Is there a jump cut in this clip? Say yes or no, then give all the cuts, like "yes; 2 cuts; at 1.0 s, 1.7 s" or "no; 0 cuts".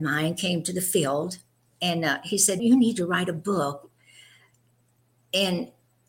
yes; 1 cut; at 2.6 s